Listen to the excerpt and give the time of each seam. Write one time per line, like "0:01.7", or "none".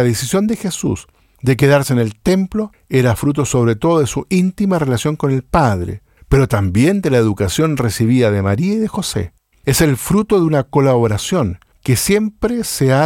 0:09.5